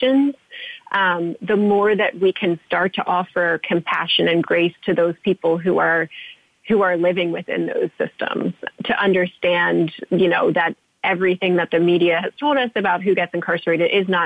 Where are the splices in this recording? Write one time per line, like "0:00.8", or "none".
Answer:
0:08.7